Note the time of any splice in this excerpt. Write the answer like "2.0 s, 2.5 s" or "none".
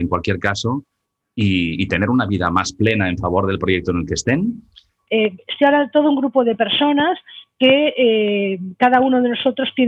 5.1 s